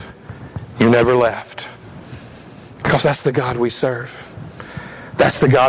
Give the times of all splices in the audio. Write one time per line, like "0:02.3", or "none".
none